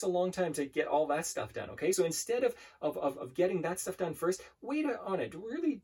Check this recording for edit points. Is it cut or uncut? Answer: uncut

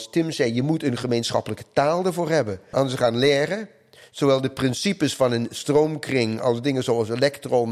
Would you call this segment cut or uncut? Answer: cut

